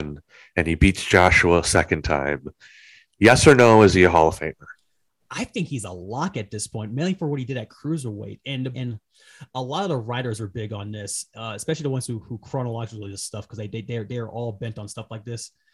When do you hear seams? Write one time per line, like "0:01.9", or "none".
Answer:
0:08.7